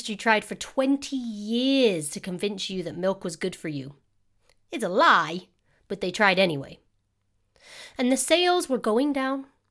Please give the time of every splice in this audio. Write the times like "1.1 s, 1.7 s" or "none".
none

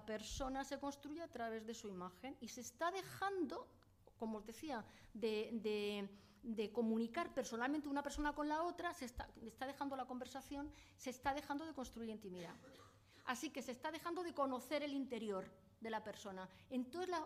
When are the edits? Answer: none

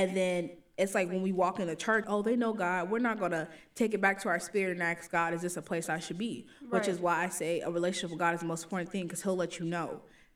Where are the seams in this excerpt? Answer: 2.0 s

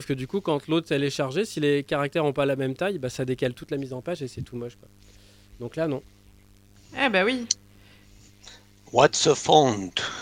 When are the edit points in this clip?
none

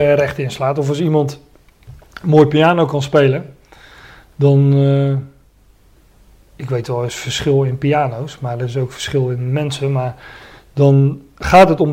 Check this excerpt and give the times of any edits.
none

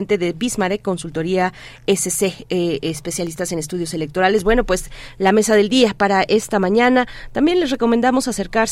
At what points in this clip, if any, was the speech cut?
none

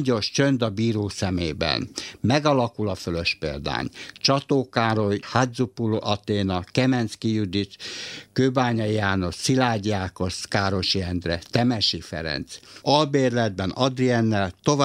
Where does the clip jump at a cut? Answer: 5.2 s, 12.8 s

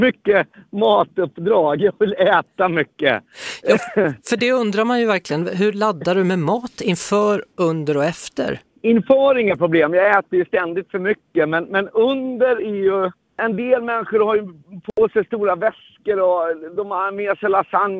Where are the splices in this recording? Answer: none

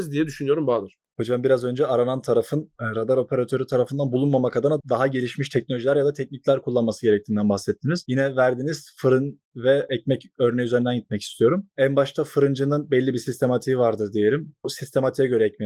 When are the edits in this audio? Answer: none

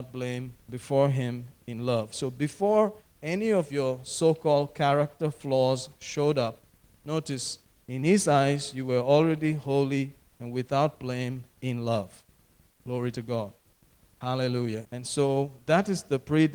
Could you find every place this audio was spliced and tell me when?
11.5 s, 14.8 s

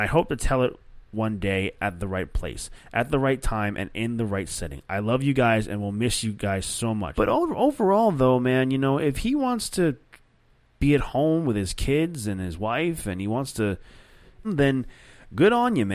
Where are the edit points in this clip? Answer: 7.1 s, 14.4 s

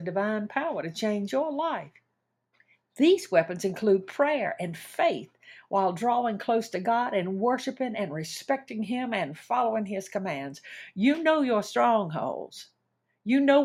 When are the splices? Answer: none

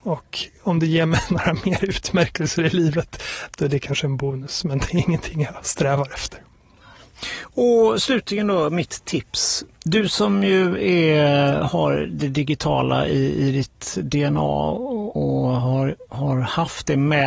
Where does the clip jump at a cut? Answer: 15.2 s

